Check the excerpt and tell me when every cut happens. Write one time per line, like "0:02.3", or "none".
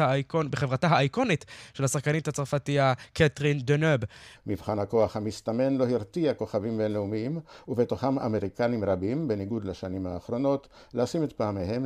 0:04.3